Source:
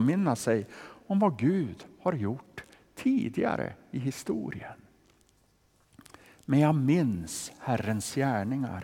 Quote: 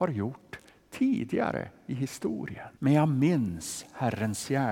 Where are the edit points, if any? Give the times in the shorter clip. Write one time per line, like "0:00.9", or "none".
0:02.8